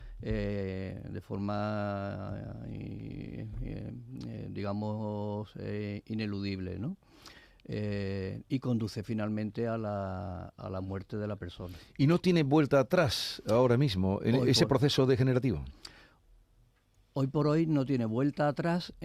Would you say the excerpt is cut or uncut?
uncut